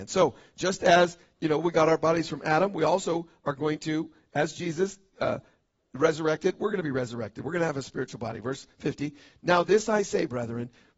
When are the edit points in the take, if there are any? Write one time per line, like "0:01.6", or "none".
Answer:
none